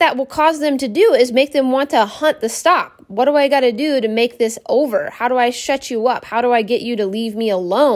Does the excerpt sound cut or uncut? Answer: uncut